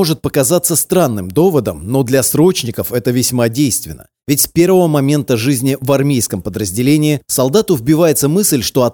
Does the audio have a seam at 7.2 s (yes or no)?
yes